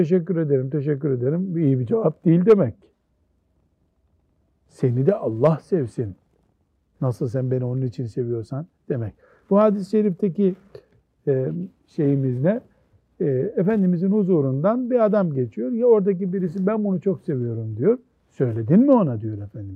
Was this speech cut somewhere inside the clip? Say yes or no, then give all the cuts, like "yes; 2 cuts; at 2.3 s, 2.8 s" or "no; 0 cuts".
no; 0 cuts